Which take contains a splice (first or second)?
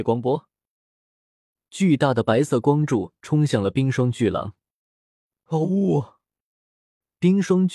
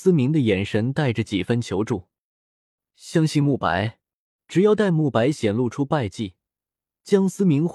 second